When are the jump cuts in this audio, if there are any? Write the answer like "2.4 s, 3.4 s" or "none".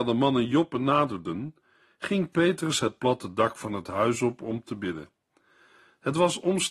none